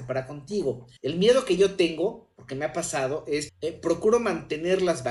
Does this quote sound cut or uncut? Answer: cut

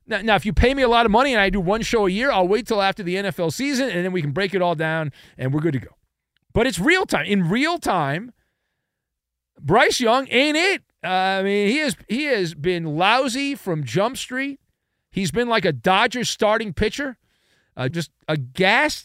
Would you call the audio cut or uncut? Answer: cut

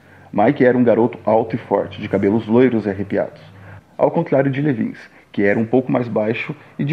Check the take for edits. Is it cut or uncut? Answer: uncut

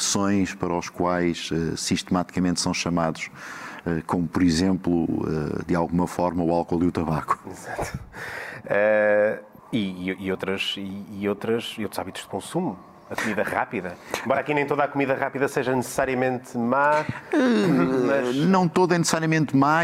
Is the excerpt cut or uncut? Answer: cut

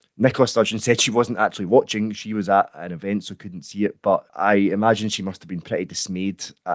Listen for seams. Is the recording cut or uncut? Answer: uncut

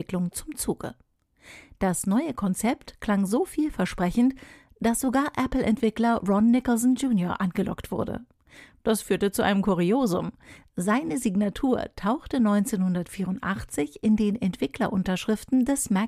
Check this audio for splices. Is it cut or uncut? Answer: uncut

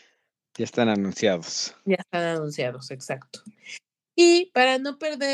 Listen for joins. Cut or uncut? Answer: uncut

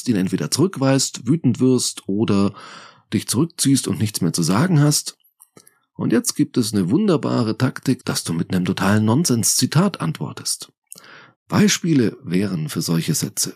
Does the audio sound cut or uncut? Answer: cut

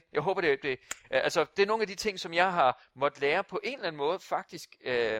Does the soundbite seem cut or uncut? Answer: uncut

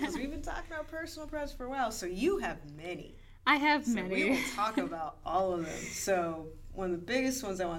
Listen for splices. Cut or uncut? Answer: uncut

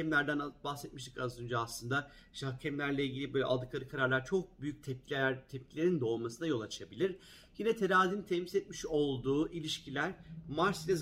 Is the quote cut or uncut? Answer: uncut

